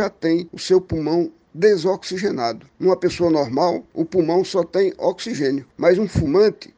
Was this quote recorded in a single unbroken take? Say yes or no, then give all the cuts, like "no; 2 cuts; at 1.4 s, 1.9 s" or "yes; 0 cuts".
yes; 0 cuts